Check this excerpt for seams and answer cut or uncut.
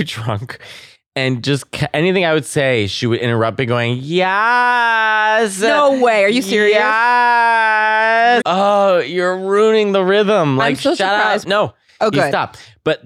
cut